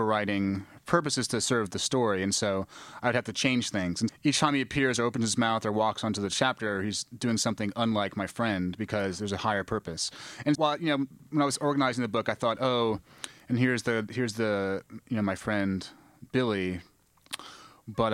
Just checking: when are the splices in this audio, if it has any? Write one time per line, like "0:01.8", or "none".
0:04.1
0:10.5